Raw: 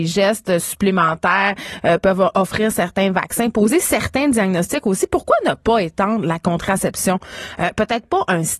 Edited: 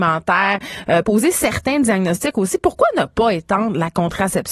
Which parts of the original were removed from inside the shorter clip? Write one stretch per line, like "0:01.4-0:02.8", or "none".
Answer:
0:02.0-0:03.5